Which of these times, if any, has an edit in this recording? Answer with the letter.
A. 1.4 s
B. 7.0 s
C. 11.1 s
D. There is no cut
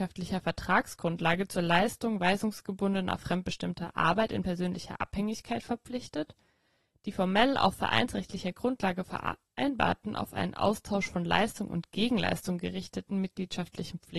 D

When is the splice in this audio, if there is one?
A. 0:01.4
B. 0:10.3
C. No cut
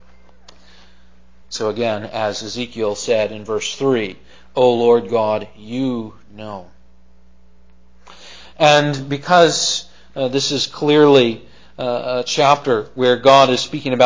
A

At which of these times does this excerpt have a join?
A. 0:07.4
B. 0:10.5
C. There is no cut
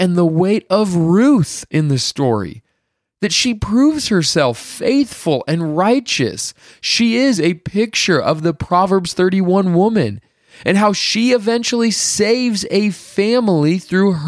A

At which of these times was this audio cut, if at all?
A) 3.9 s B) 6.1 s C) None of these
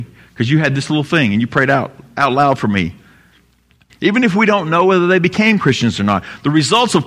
A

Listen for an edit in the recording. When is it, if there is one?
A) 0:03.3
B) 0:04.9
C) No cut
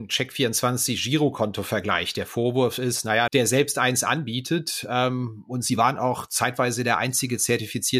A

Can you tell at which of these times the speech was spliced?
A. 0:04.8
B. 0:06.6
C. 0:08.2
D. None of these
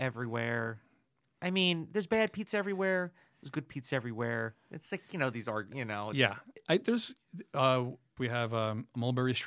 C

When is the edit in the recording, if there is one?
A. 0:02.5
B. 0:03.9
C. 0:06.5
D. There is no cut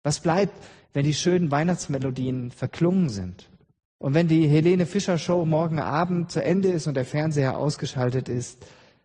B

